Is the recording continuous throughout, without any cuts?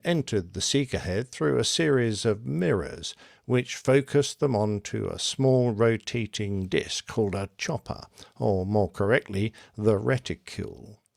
yes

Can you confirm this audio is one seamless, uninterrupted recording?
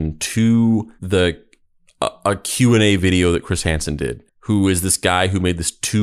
no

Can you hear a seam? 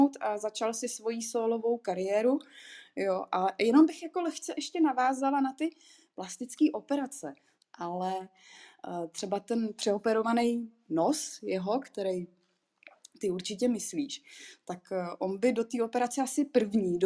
yes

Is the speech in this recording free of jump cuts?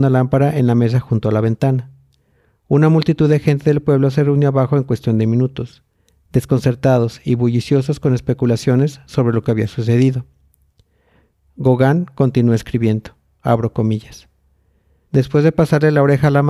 no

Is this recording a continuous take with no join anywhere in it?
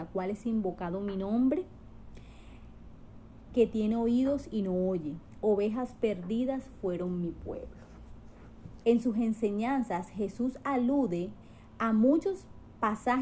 no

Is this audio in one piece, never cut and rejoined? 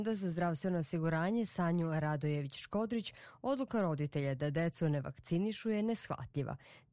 yes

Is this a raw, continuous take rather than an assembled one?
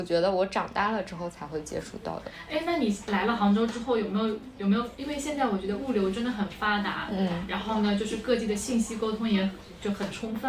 yes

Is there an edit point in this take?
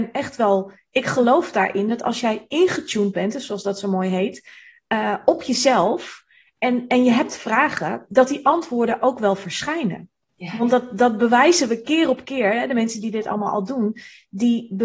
no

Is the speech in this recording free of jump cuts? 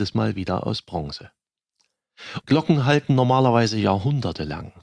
no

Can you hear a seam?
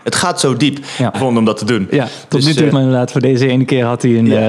yes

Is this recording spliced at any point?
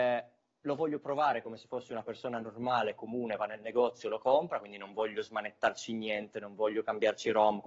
no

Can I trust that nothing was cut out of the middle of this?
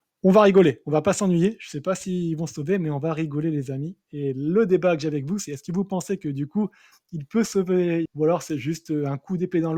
no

